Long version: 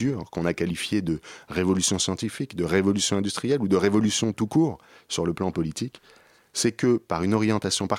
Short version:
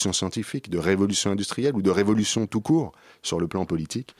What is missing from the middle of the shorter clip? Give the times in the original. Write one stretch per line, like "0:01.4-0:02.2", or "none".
none

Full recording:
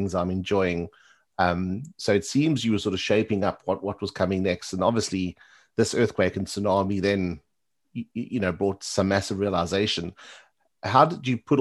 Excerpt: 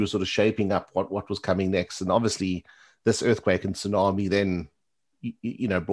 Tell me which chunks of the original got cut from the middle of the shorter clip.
none

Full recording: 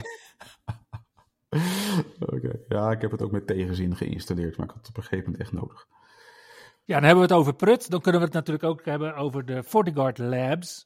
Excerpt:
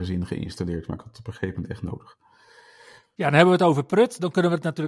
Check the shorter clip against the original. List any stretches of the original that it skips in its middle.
none

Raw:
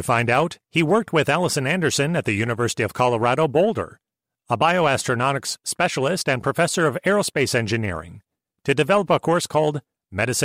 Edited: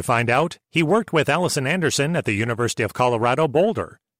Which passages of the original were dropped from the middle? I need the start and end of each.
none

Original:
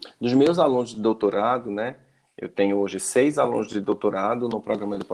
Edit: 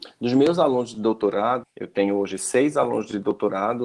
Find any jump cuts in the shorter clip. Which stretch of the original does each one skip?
0:01.6-0:02.2

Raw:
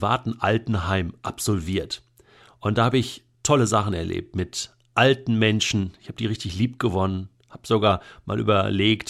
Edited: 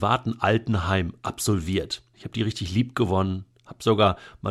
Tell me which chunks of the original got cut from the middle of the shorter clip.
0:02.1-0:06.0

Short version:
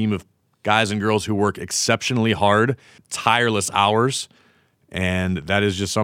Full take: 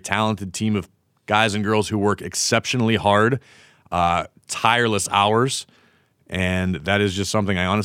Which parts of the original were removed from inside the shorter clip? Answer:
0:03.6-0:04.4

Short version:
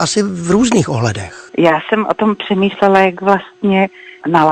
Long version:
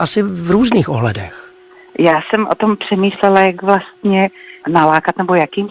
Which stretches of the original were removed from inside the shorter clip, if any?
0:01.5-0:01.9

